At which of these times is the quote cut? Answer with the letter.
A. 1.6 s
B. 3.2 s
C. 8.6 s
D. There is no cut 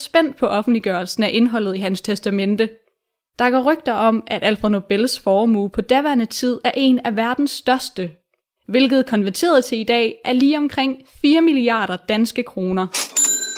C